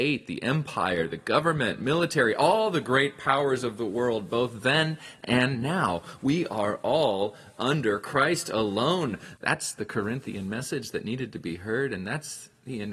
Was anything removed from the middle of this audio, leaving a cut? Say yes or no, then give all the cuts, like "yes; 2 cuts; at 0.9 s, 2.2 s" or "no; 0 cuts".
yes; 1 cut; at 9.4 s